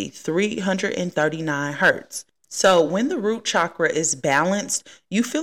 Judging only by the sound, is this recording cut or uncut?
uncut